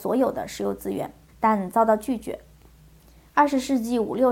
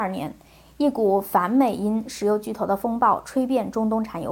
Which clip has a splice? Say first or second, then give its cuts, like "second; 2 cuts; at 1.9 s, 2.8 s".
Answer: first; 1 cut; at 1.3 s